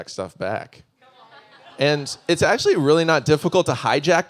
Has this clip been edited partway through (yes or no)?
no